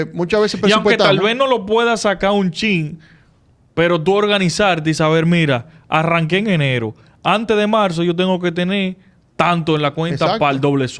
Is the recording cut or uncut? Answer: uncut